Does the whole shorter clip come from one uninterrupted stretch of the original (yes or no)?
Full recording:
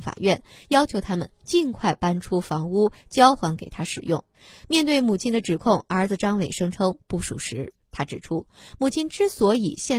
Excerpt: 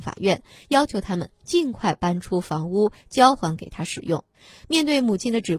yes